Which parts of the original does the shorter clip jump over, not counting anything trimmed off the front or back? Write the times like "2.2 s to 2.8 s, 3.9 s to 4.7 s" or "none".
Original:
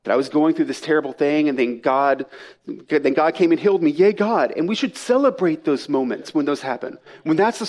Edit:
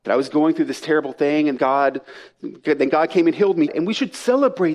1.6 s to 1.8 s, 3.9 s to 4.5 s